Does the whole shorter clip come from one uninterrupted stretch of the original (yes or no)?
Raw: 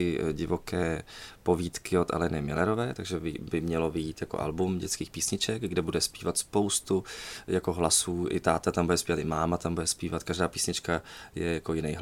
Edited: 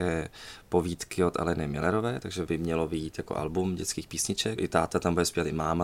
no